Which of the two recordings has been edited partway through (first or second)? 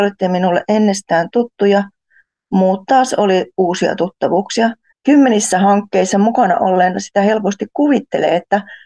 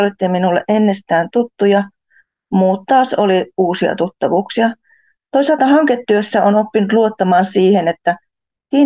first